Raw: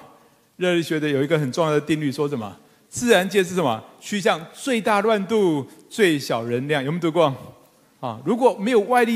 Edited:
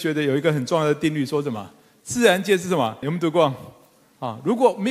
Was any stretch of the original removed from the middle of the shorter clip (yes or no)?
yes